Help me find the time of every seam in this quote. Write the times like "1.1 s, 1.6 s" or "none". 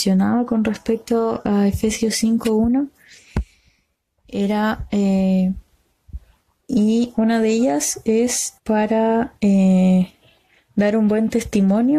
6.6 s, 8.6 s